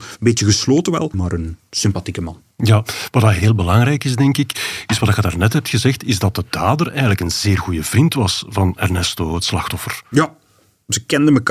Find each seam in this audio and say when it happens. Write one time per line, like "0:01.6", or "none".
0:01.1